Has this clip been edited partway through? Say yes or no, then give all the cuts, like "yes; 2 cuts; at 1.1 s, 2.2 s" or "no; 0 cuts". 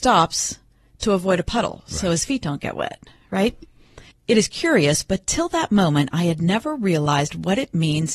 yes; 1 cut; at 4.1 s